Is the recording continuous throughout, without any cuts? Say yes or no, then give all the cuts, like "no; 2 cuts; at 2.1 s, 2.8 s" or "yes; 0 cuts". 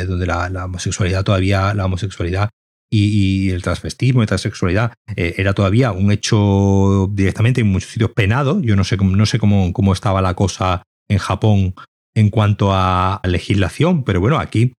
no; 2 cuts; at 9.7 s, 13.2 s